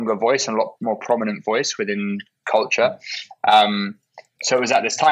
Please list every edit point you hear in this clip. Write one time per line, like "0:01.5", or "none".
none